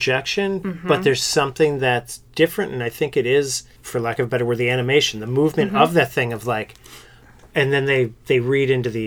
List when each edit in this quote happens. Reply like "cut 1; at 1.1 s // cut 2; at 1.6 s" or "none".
cut 1; at 3.8 s

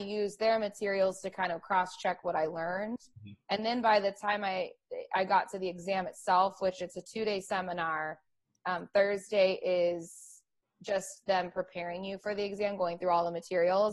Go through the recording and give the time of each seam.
none

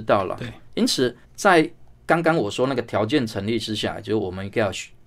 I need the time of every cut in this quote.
cut 1; at 1.2 s

